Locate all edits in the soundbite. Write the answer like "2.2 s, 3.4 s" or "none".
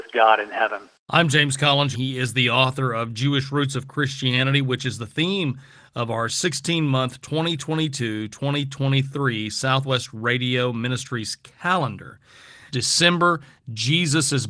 1.9 s, 12.7 s